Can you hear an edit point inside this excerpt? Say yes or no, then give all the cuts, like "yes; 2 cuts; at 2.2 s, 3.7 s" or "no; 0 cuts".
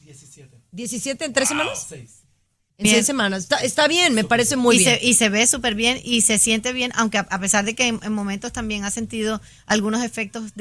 no; 0 cuts